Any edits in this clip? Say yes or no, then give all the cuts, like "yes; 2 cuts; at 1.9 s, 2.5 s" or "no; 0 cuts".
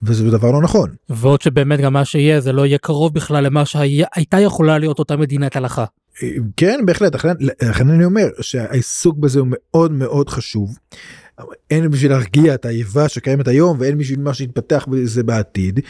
no; 0 cuts